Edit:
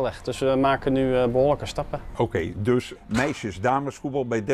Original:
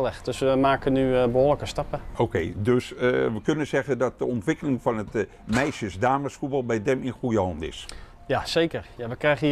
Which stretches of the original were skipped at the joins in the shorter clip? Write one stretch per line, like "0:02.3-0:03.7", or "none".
0:02.9-0:05.3